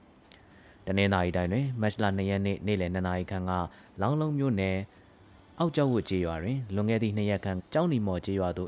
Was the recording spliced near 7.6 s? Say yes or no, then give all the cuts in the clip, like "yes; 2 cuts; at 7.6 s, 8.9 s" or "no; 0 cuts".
yes; 1 cut; at 7.6 s